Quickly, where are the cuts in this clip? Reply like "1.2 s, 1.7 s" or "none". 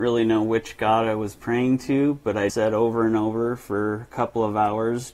2.5 s

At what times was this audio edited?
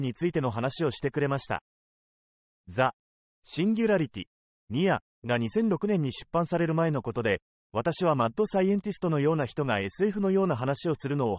4.5 s

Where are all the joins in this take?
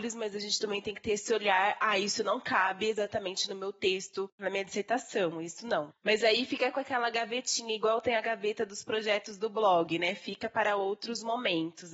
none

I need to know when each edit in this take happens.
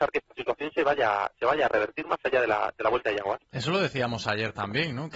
none

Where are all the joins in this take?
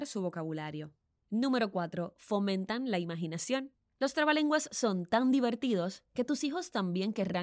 none

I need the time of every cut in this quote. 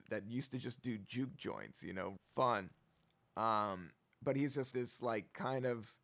2.2 s, 4.7 s

